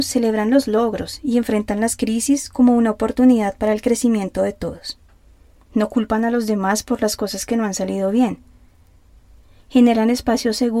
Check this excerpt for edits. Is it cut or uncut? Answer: cut